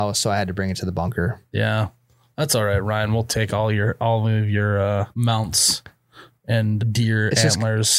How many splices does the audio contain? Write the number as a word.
two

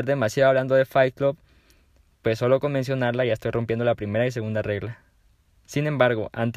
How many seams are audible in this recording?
zero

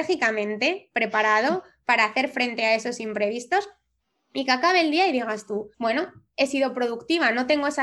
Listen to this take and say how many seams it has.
one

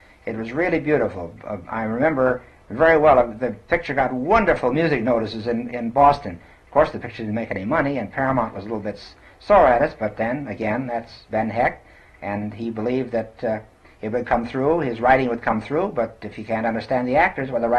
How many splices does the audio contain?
zero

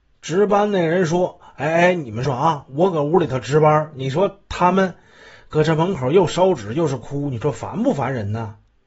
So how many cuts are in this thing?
one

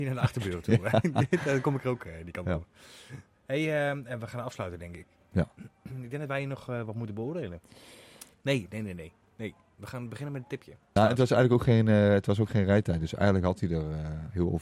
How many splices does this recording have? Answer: one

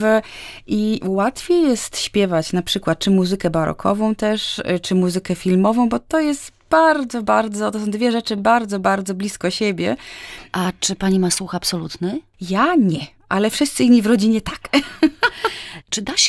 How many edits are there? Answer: zero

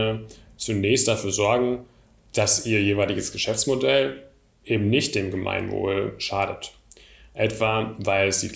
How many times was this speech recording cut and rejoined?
zero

